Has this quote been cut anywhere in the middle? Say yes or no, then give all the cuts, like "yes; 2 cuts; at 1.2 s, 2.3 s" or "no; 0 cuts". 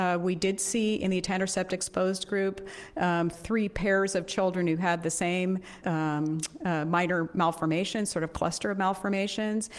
yes; 2 cuts; at 3.3 s, 5.8 s